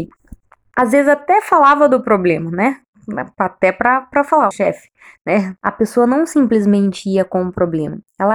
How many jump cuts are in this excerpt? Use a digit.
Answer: 2